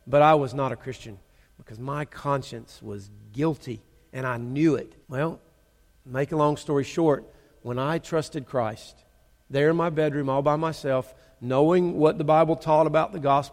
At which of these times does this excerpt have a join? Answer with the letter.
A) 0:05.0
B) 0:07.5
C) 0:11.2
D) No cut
A